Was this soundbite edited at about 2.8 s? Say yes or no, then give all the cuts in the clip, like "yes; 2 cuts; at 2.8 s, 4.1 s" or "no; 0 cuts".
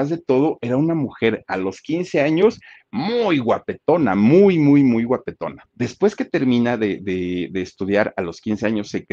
no; 1 cut; at 5.6 s